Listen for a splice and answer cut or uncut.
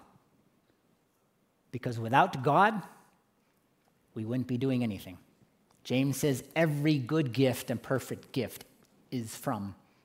uncut